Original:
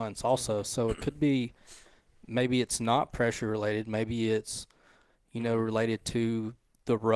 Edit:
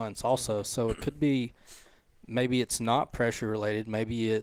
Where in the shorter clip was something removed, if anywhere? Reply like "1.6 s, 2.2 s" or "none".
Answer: none